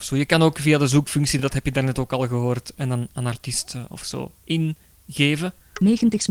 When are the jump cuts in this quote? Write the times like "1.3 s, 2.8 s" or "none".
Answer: none